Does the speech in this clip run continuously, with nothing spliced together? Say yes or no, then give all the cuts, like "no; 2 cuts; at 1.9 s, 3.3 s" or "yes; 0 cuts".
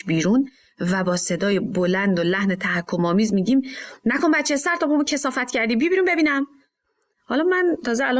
yes; 0 cuts